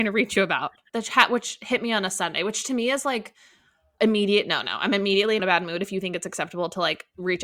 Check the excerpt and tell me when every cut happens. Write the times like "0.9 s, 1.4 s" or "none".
0.9 s, 4.0 s, 5.4 s

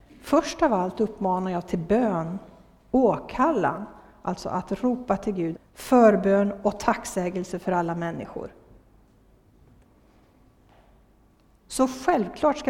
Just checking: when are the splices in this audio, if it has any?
5.5 s

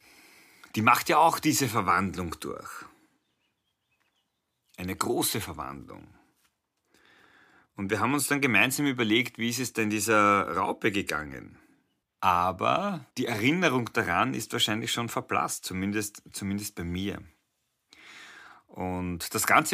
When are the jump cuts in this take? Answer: 12.0 s, 13.1 s

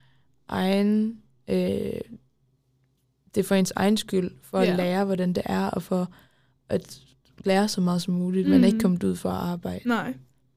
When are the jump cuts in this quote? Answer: none

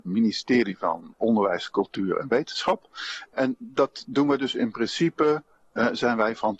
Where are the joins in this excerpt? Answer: 1.1 s, 3.3 s

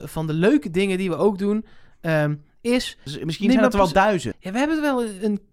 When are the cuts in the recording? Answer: 3.1 s, 4.3 s

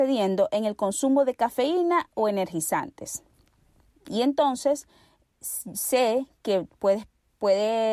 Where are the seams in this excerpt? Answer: none

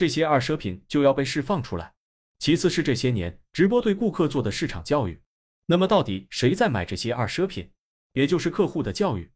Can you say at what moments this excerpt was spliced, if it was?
7.9 s

